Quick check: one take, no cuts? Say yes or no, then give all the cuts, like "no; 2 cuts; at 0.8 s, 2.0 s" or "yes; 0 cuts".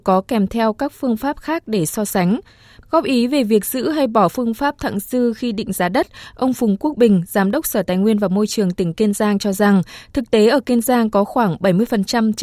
no; 1 cut; at 2.8 s